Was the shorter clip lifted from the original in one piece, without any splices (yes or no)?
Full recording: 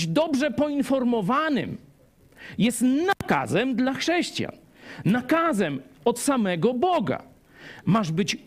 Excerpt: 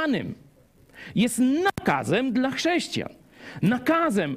yes